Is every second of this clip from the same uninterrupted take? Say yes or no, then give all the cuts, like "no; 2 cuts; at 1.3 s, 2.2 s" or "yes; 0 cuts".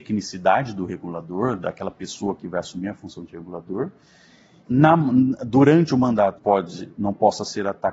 no; 2 cuts; at 4.7 s, 6.4 s